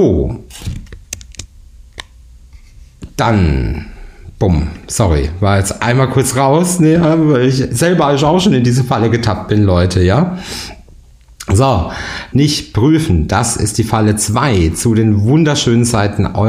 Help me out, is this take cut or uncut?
cut